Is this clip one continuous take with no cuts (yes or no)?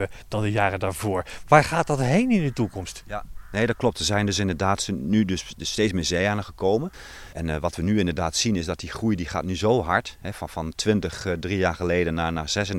yes